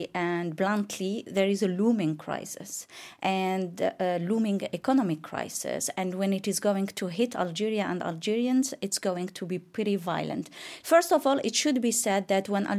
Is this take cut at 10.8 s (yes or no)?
yes